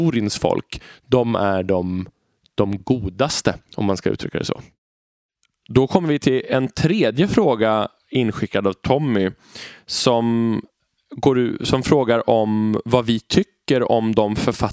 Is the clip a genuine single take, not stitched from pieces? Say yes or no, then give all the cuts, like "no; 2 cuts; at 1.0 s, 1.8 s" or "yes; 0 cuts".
yes; 0 cuts